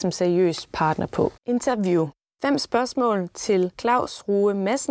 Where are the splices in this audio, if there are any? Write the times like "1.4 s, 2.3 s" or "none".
1.4 s